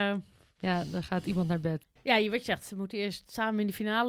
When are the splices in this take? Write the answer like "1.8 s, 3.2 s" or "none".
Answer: 2.0 s